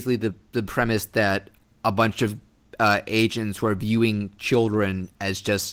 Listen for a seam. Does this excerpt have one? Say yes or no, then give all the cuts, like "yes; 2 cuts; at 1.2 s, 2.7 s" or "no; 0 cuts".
no; 0 cuts